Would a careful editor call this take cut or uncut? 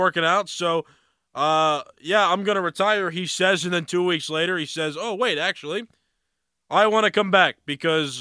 uncut